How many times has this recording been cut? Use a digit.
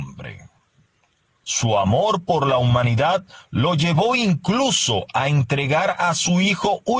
1